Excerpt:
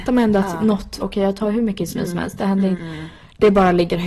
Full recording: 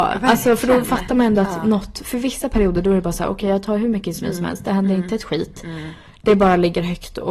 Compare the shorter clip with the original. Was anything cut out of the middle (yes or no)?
yes